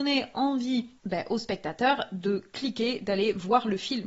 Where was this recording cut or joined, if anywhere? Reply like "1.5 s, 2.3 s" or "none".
1.0 s